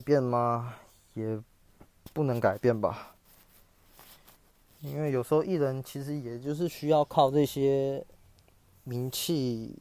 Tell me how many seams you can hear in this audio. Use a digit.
0